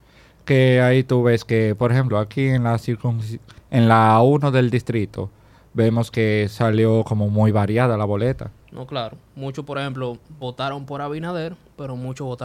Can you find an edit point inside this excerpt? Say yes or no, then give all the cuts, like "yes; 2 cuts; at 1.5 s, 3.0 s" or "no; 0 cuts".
no; 0 cuts